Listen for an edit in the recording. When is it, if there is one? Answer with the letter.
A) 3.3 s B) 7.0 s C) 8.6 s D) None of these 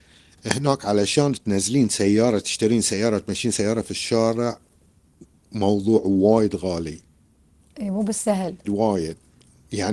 C